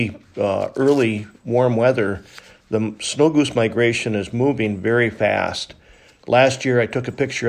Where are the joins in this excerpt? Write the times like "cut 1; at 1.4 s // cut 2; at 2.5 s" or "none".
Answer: cut 1; at 6.2 s